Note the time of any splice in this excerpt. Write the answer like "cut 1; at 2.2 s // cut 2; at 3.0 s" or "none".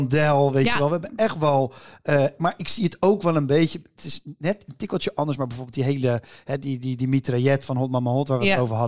none

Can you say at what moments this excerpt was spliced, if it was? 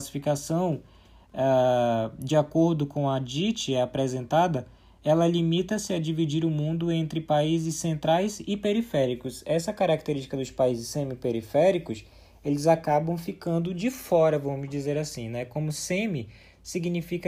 none

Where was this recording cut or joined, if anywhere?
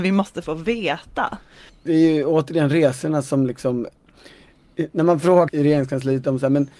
cut 1; at 1.7 s // cut 2; at 5.5 s

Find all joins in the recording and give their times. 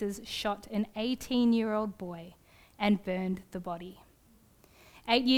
none

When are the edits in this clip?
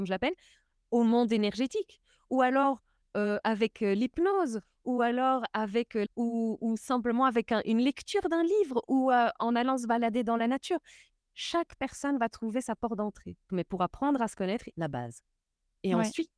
cut 1; at 6.1 s // cut 2; at 13.5 s // cut 3; at 14.7 s

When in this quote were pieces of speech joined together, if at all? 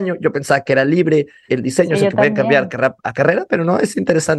cut 1; at 1.5 s

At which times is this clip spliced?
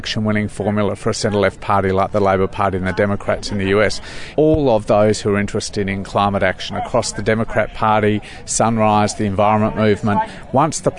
cut 1; at 4.3 s

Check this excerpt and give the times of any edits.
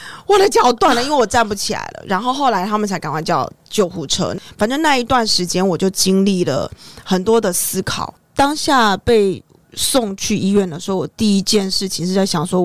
none

